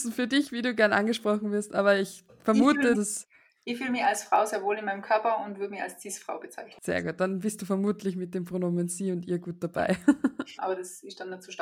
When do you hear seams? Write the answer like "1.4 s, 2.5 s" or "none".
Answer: 2.9 s, 10.6 s